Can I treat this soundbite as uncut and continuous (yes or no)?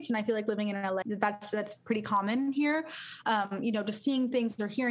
no